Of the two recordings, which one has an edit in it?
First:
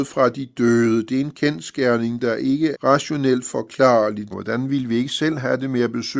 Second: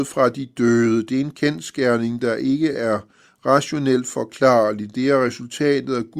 first; 2 cuts; at 2.7 s, 4.3 s

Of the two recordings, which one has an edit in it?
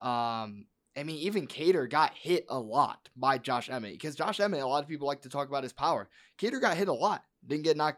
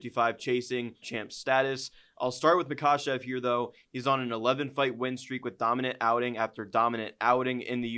second; 2 cuts; at 1.0 s, 3.8 s

